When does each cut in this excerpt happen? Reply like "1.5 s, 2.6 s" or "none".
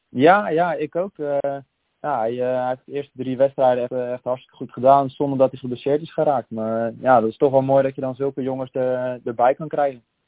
3.9 s